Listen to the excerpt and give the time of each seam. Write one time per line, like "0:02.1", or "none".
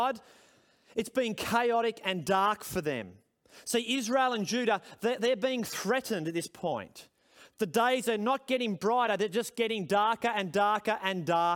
none